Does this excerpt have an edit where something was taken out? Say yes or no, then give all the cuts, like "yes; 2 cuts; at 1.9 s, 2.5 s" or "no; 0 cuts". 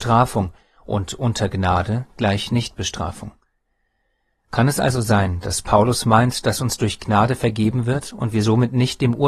no; 0 cuts